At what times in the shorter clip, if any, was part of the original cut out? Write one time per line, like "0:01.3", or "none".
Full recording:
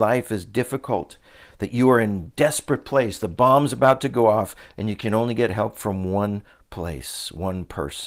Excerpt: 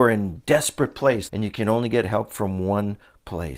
0:01.3